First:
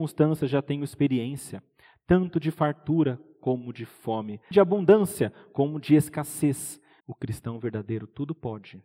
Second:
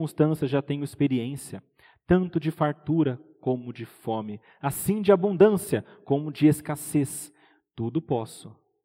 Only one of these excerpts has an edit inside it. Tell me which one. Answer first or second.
first